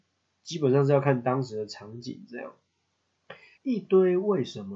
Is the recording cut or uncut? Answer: cut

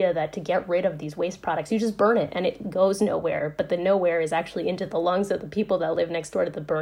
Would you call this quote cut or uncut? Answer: uncut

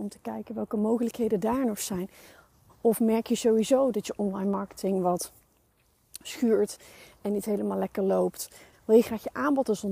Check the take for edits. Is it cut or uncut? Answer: cut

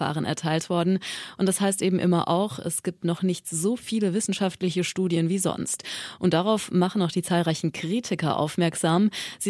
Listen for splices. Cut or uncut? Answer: uncut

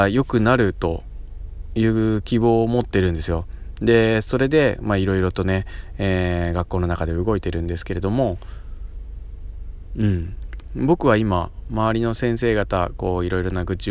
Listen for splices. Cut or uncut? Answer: uncut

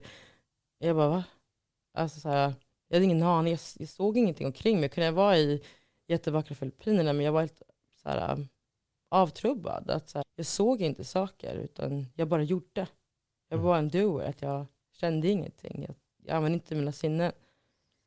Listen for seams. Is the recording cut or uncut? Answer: cut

